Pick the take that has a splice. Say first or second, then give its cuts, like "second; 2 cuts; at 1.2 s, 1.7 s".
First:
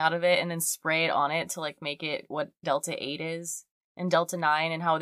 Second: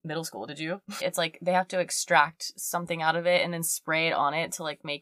second; 1 cut; at 1.0 s